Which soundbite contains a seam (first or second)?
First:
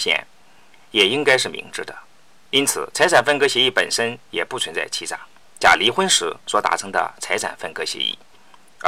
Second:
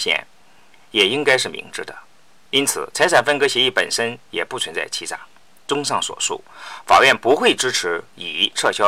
first